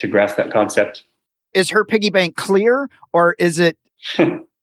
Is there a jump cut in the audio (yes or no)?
no